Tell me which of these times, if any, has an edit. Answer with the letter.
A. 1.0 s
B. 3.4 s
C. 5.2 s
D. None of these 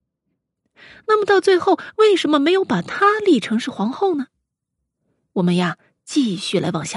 D